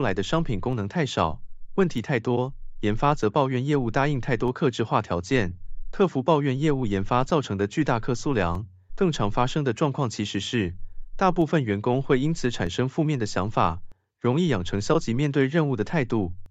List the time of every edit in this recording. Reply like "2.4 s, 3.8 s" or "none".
8.9 s

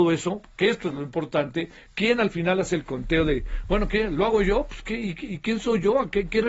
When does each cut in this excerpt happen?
none

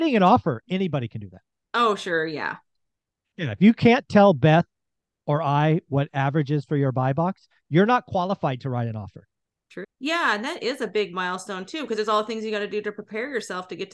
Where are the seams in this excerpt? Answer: 3.2 s, 9.8 s

